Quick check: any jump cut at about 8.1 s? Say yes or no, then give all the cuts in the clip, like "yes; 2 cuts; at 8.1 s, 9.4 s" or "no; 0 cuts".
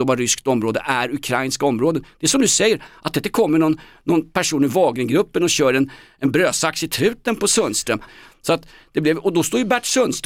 yes; 1 cut; at 8.1 s